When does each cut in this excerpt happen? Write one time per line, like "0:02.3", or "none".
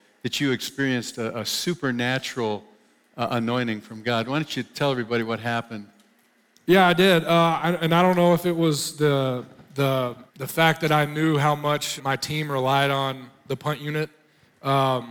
0:10.3
0:12.0